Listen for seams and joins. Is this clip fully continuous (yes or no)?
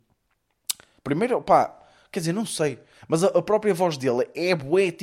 no